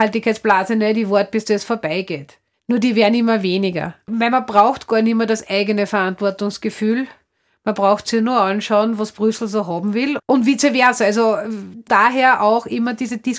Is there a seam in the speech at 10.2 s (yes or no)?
yes